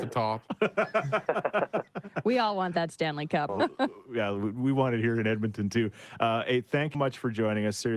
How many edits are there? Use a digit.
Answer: 2